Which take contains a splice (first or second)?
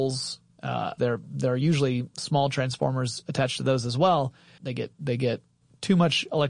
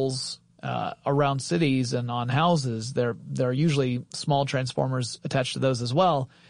first